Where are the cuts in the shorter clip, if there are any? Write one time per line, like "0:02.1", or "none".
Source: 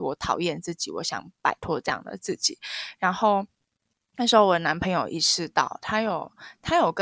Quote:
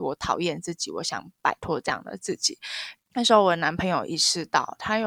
0:03.0